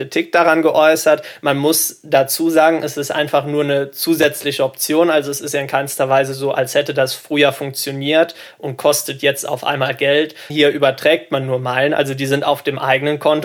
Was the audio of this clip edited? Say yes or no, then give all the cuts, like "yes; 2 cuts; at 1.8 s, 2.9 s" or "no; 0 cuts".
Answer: yes; 1 cut; at 10.5 s